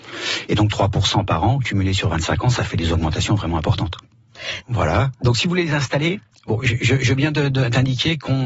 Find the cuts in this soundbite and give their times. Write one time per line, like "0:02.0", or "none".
0:04.6